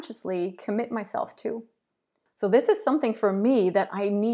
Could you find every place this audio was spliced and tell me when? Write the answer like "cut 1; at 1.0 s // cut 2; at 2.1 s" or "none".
cut 1; at 2.3 s